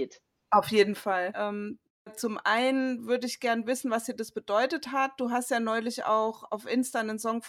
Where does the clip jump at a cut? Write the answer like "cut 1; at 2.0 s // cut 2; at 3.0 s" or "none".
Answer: cut 1; at 1.3 s